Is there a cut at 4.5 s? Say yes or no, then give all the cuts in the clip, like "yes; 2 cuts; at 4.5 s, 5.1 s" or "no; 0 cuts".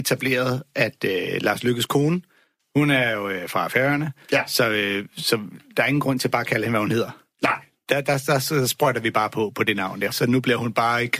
no; 1 cut; at 10.1 s